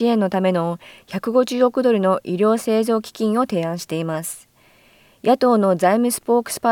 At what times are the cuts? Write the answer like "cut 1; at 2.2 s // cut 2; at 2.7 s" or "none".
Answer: none